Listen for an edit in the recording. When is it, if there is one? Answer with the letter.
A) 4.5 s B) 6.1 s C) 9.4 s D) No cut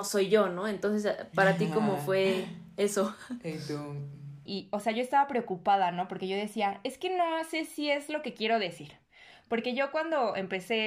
A